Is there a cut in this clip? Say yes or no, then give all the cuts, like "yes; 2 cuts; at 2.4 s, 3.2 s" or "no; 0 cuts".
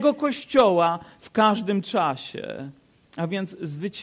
no; 0 cuts